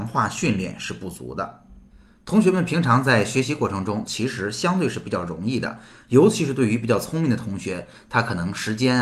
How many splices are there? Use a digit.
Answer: 1